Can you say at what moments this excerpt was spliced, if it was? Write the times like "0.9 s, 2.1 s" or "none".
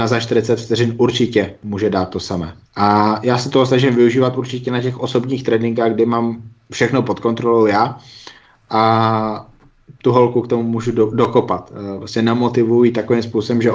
2.7 s